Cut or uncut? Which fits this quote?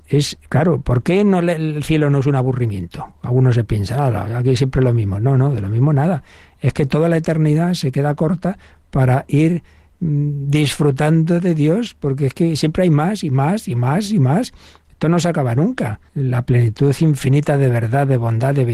cut